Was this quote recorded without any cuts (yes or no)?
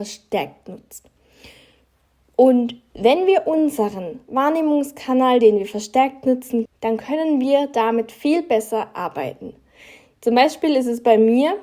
no